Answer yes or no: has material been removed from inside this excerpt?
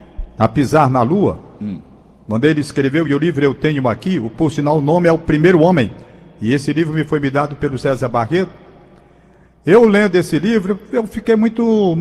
no